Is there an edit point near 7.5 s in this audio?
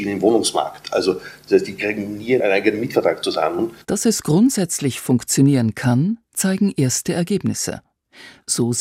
no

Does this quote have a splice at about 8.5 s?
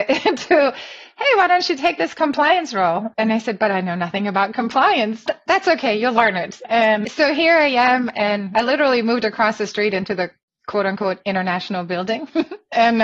no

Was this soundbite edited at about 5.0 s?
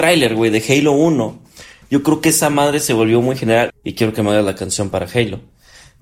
no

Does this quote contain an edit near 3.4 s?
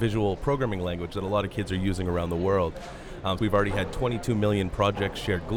yes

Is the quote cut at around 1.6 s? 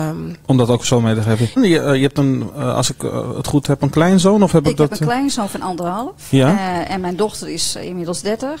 yes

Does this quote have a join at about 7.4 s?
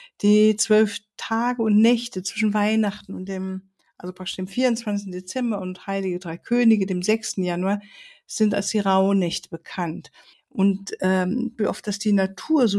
no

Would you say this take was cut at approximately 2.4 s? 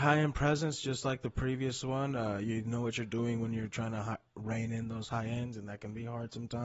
no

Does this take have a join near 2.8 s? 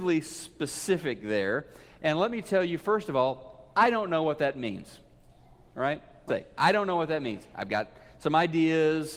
no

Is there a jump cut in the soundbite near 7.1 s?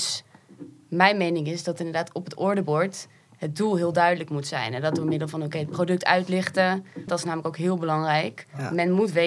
yes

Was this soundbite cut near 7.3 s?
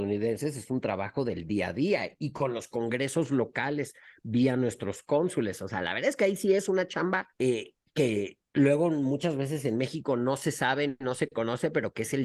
yes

